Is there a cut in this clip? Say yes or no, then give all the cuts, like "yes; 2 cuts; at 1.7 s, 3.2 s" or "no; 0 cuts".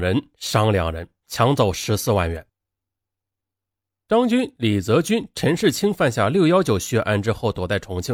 no; 0 cuts